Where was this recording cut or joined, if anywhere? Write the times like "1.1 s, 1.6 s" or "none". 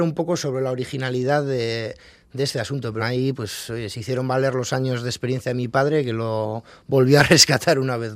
3.0 s